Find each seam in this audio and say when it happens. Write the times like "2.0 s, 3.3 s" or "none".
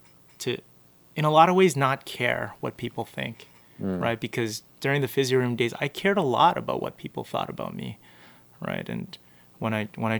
none